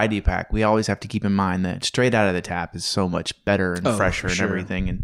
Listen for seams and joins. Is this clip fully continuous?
yes; 0 cuts

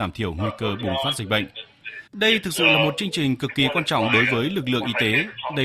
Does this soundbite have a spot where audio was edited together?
yes; 1 cut; at 2.1 s

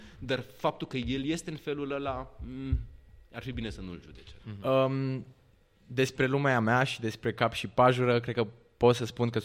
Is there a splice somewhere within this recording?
yes; 1 cut; at 4.4 s

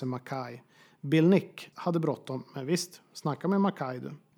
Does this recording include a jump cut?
yes; 1 cut; at 1.7 s

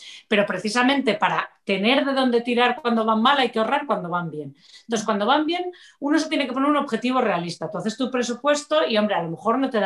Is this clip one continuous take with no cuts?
yes; 0 cuts

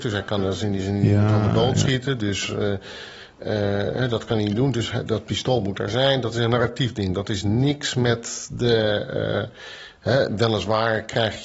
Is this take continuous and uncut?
yes; 0 cuts

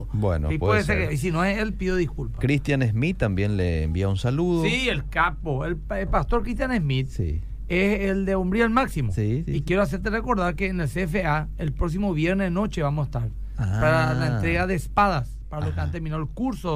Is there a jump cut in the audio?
no; 0 cuts

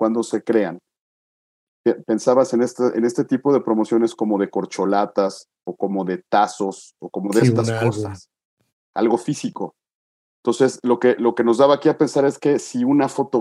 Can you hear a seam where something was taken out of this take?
no; 0 cuts

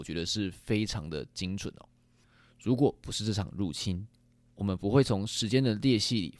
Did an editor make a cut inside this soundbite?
no; 0 cuts

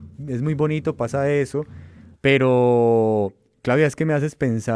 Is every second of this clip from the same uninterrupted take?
no; 1 cut; at 2.1 s

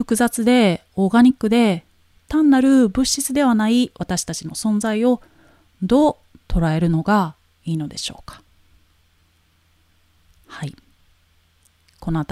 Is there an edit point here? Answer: no; 0 cuts

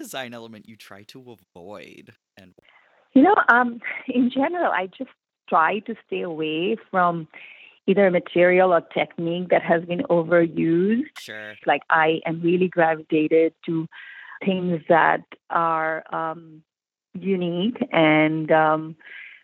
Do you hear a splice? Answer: yes; 3 cuts; at 11.6 s, 14.4 s, 17.0 s

